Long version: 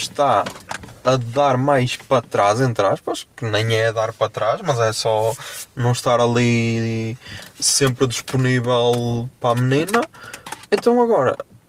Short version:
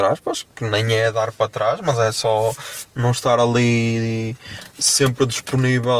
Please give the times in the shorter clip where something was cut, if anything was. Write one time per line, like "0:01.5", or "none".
none